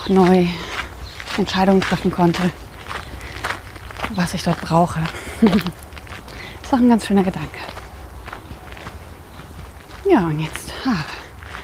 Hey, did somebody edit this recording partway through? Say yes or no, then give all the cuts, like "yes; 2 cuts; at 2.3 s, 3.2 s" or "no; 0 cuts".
no; 0 cuts